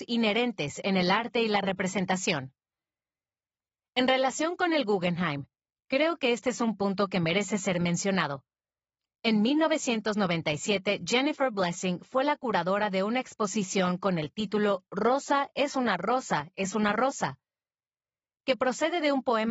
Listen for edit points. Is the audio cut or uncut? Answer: uncut